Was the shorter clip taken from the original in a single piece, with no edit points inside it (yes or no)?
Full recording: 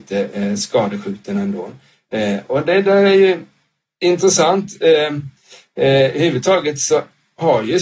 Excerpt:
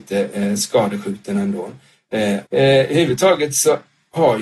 no